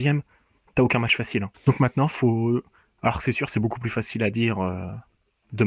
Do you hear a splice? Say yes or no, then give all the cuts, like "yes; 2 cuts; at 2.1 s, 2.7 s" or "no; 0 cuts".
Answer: yes; 1 cut; at 1.5 s